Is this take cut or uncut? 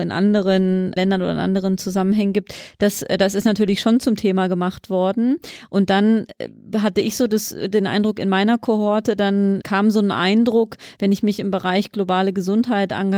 uncut